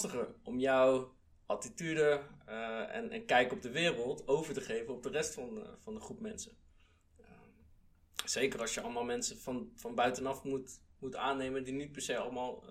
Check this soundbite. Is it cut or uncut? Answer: uncut